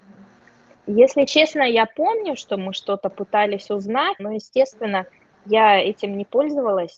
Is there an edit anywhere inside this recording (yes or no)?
yes